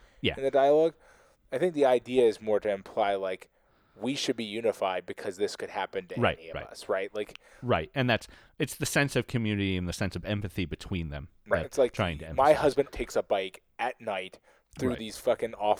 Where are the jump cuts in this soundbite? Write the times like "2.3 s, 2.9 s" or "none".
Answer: 11.6 s, 12.9 s